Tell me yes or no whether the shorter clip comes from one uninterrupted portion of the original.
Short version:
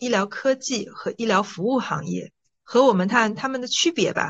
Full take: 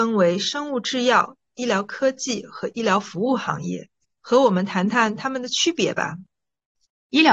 no